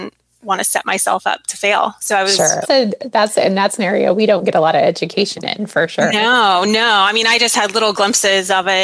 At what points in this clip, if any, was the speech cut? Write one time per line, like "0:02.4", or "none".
0:02.6